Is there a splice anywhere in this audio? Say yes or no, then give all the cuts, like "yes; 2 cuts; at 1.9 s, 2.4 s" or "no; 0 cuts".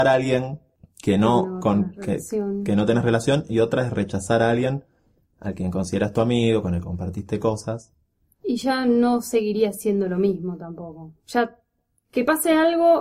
no; 0 cuts